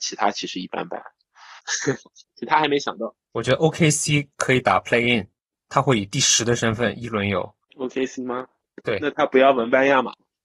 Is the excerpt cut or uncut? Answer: cut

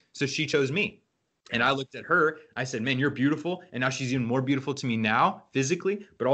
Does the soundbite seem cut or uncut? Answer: uncut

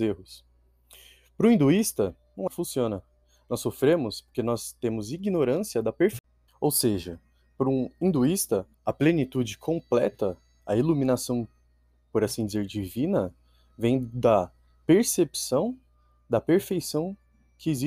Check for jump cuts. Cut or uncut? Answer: cut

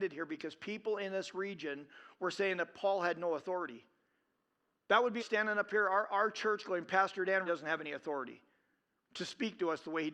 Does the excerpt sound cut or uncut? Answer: cut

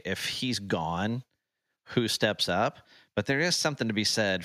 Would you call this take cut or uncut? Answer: uncut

